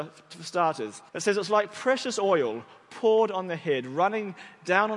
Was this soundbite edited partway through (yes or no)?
yes